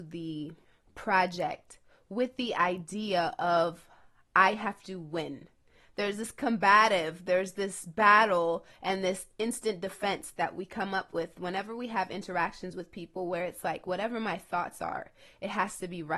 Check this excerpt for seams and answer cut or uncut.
uncut